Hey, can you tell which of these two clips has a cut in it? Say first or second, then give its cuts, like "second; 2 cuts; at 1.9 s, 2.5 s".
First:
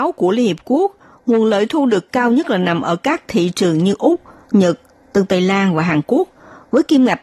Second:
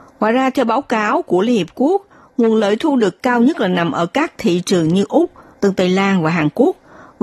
second; 1 cut; at 5.5 s